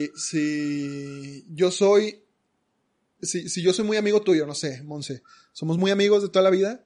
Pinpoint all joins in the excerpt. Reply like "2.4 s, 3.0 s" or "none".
none